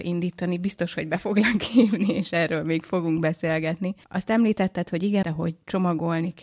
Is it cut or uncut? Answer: cut